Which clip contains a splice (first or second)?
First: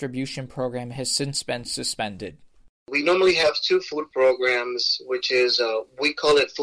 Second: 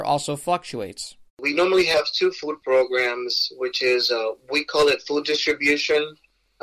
second